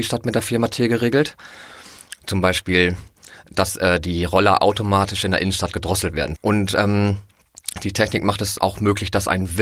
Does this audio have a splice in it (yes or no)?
yes